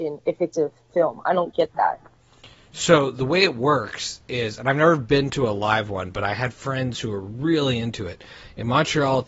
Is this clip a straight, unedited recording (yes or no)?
yes